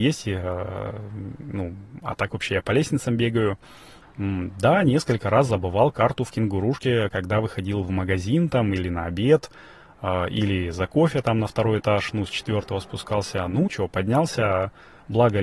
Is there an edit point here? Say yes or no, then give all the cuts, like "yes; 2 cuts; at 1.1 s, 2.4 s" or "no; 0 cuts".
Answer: yes; 2 cuts; at 4.0 s, 13.7 s